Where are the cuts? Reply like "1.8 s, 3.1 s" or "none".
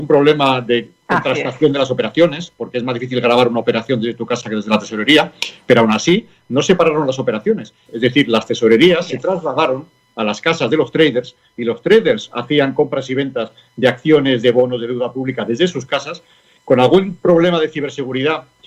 7.9 s